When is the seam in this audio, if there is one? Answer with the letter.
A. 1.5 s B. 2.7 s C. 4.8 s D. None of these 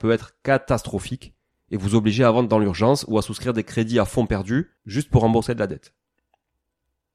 C